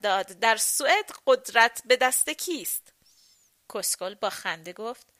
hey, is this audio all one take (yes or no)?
no